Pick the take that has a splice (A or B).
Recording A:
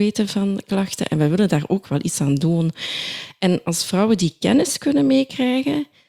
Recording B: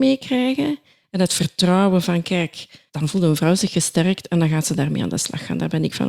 B